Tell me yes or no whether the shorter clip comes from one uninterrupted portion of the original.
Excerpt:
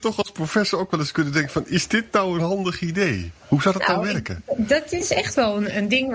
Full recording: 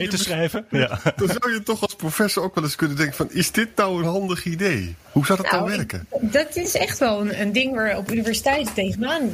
yes